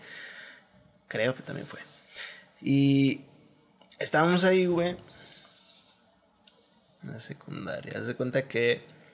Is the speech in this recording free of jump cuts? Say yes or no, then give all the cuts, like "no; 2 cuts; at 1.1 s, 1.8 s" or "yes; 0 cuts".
no; 1 cut; at 7.0 s